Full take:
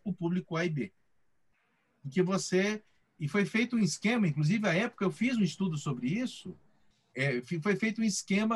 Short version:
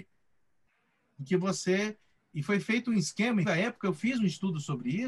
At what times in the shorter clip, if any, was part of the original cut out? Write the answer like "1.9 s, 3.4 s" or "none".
3.4 s